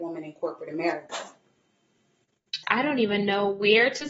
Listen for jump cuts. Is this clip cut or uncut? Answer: cut